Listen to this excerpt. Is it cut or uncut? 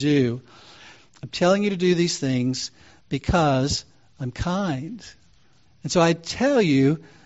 cut